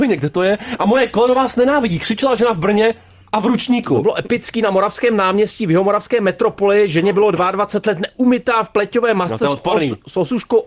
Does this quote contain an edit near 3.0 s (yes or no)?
no